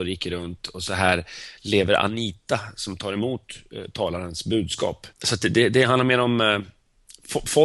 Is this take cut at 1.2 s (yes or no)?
no